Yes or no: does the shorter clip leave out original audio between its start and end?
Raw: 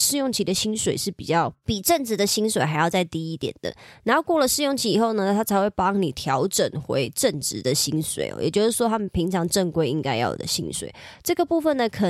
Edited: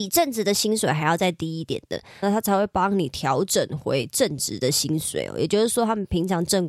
yes